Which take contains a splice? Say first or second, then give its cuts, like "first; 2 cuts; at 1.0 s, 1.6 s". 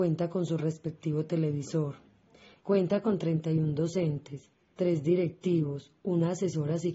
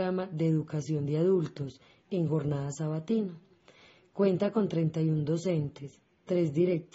first; 1 cut; at 2.6 s